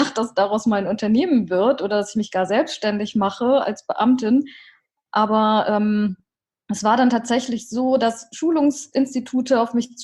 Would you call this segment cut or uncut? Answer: uncut